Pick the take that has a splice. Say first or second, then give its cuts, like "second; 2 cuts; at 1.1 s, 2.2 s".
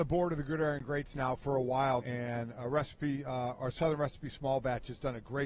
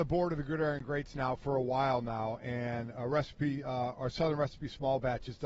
first; 1 cut; at 2.0 s